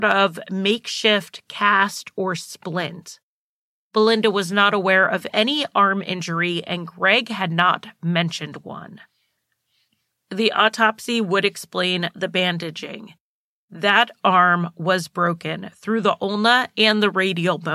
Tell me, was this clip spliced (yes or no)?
no